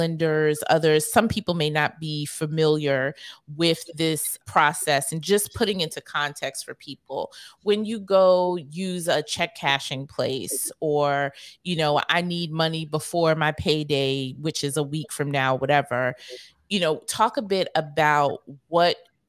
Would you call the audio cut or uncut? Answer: uncut